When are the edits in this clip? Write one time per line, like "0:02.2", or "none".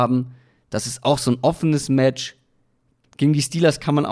0:03.0

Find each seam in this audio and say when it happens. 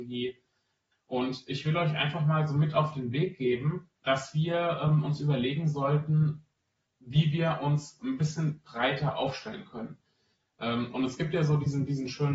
0:00.9
0:04.0

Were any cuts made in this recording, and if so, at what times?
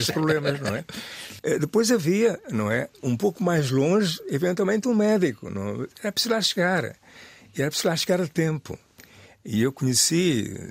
none

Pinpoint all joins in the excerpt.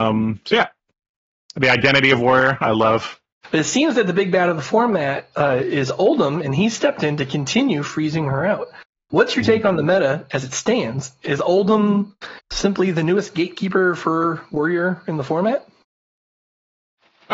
0:03.4

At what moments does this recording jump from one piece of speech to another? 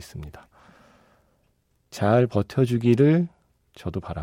none

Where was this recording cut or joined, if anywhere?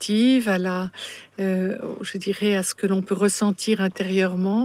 none

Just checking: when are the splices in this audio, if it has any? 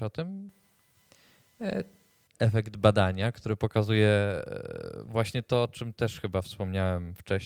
0:02.3

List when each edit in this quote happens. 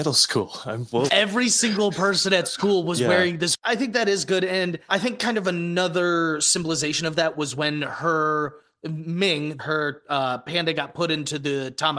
0:01.1
0:04.9
0:09.6

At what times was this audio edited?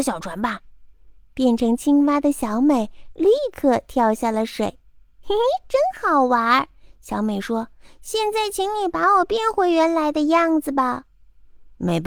none

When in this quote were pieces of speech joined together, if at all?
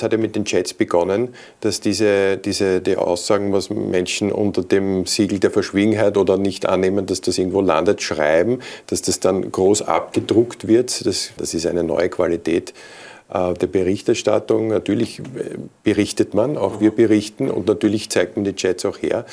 0:11.4

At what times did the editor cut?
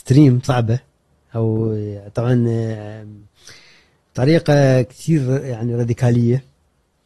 none

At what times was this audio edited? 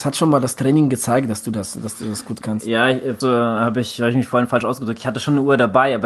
0:03.2

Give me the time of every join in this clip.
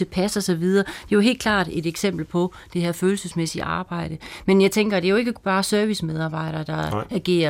none

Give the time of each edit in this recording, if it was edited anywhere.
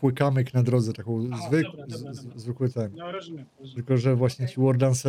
none

